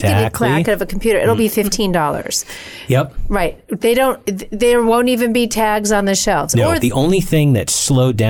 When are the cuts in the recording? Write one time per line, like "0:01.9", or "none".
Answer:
0:06.8